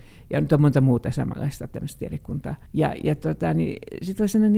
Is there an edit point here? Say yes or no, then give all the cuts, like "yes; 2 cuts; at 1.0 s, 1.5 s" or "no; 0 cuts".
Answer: yes; 1 cut; at 2.7 s